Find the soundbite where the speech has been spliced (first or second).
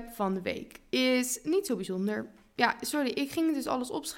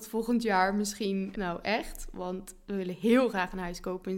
second